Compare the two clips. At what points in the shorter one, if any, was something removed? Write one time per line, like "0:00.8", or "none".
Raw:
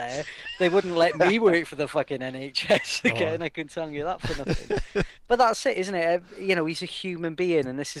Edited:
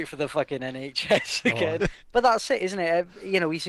0:01.8